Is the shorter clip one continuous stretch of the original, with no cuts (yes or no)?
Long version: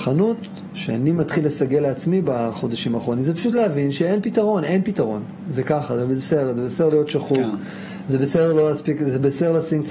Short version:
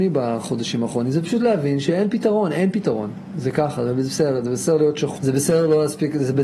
no